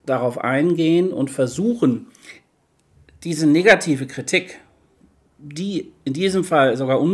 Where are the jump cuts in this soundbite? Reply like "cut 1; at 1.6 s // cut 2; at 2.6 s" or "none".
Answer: none